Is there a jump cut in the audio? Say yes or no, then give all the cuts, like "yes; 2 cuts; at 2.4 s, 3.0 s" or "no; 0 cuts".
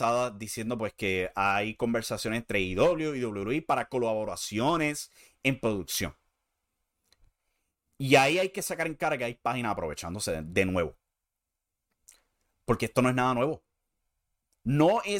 no; 0 cuts